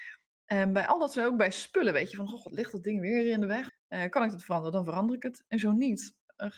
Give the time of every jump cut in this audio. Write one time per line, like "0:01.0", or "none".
0:03.7